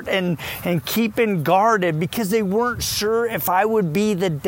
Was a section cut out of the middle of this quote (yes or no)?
no